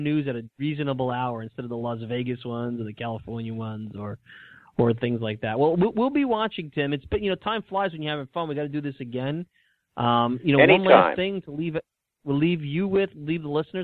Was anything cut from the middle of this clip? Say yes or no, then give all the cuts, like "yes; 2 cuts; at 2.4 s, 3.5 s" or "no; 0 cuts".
no; 0 cuts